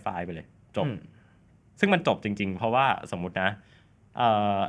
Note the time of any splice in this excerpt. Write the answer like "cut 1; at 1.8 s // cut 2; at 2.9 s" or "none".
none